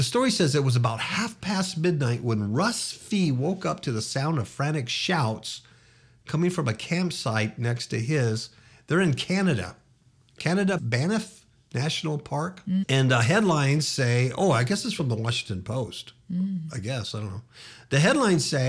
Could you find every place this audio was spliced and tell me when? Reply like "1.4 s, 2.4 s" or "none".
10.8 s, 12.8 s